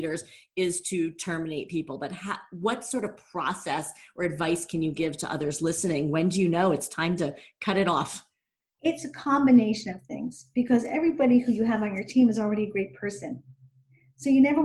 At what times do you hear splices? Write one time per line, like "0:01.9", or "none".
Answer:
none

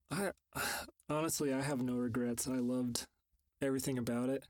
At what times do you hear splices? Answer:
none

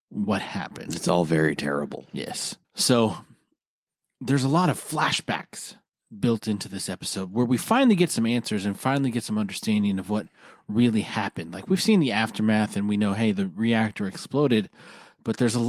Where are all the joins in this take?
0:02.6

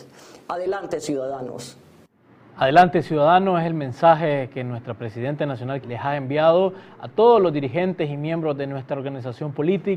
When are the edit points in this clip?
0:05.8

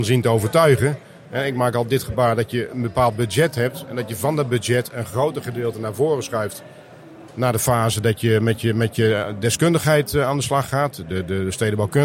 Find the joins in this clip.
none

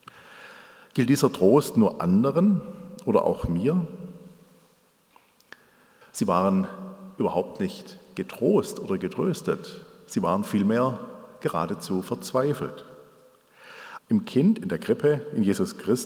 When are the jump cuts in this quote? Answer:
0:06.0
0:14.0

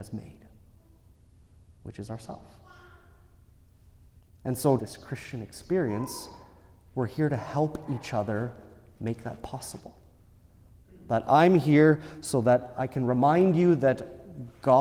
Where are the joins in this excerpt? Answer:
0:04.8

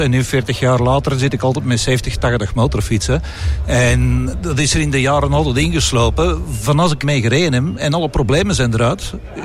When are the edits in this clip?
0:07.0

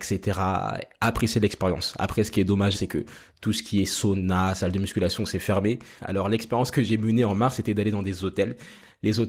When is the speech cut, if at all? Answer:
0:02.7
0:06.0

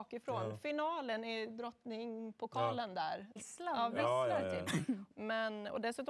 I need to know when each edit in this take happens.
0:03.4
0:05.1

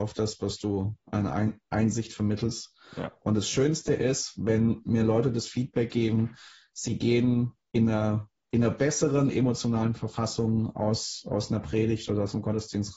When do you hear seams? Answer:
none

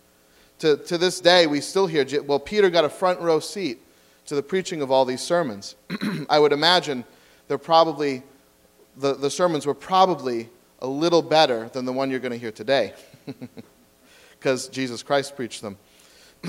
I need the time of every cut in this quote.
none

